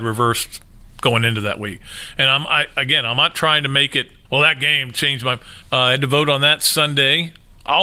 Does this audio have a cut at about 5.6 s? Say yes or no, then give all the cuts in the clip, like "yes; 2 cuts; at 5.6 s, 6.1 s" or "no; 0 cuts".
yes; 2 cuts; at 4.3 s, 5.6 s